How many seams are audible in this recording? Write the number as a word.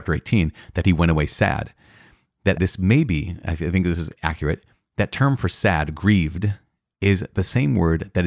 one